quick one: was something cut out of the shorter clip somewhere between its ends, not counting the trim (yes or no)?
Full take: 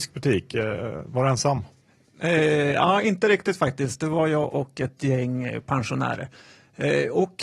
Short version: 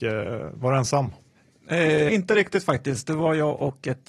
yes